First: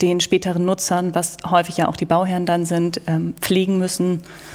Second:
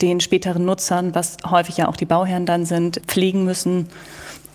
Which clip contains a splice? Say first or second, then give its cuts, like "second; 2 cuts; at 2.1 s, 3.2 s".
second; 1 cut; at 3.0 s